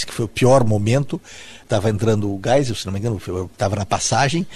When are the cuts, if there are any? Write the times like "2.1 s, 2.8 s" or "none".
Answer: none